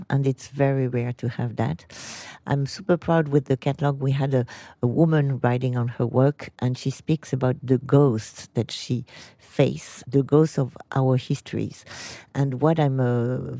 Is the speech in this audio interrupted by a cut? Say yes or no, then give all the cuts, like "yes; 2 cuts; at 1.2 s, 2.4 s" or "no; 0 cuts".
no; 0 cuts